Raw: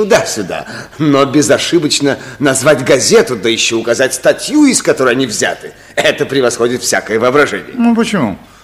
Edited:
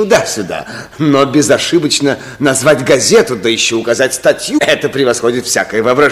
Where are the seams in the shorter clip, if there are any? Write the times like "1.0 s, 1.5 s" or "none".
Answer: 4.6 s